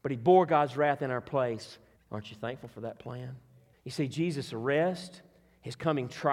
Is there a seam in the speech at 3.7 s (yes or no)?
yes